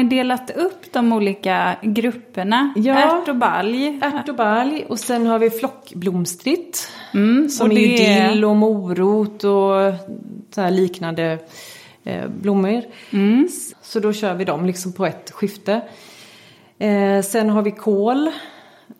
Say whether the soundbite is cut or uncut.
cut